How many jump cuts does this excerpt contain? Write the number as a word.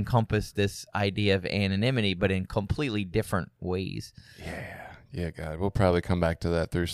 zero